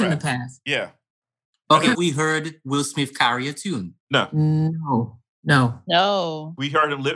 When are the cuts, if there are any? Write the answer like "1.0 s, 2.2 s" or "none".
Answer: 1.9 s, 4.0 s